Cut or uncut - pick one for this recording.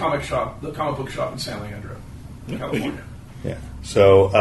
uncut